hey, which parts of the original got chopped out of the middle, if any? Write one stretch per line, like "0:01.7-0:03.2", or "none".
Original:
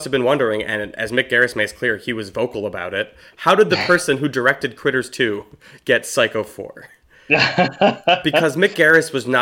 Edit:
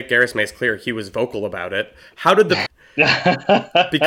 0:03.9-0:07.0